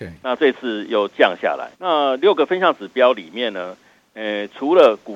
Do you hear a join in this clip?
yes; 1 cut; at 1.7 s

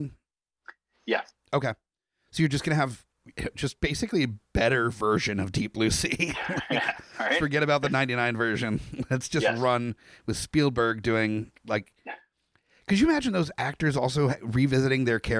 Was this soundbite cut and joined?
no; 0 cuts

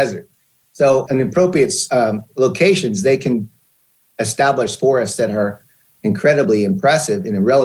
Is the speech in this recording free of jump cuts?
no; 1 cut; at 1.1 s

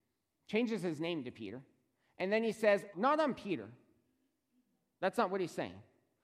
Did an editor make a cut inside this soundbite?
yes; 1 cut; at 2.9 s

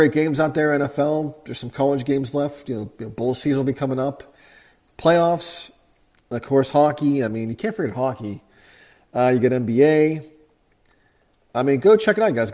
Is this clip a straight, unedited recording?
yes; 0 cuts

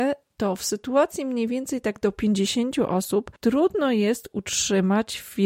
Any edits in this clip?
no; 0 cuts

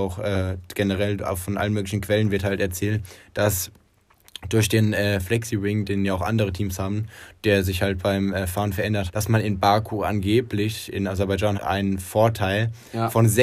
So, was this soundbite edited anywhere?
yes; 2 cuts; at 9.1 s, 11.6 s

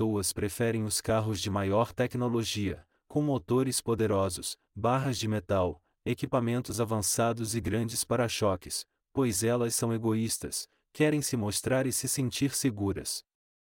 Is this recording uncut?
yes; 0 cuts

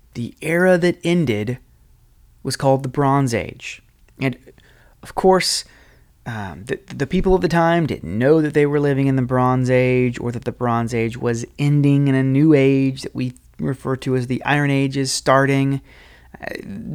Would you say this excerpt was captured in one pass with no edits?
yes; 0 cuts

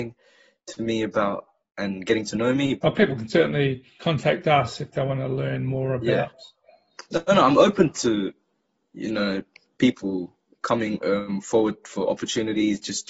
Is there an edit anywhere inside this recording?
yes; 1 cut; at 2.8 s

